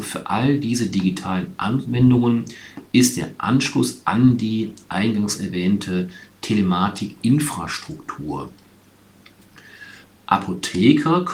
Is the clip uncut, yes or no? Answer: no